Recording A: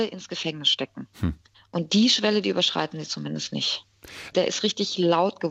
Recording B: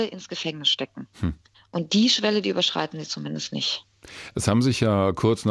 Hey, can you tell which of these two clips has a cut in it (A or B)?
A